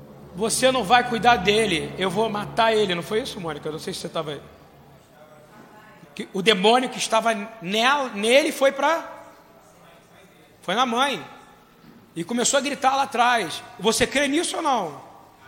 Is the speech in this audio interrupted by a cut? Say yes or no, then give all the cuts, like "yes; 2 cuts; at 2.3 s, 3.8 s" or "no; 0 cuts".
yes; 1 cut; at 6.0 s